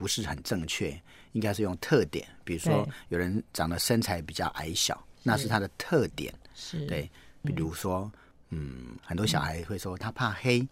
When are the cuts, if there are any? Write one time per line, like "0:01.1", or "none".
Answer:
0:05.1
0:07.4
0:09.0